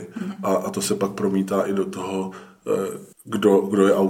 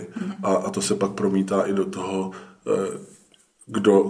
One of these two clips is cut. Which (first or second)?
first